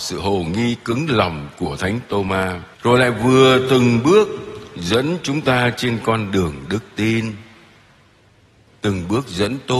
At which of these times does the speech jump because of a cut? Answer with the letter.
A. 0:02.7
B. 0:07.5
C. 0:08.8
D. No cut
A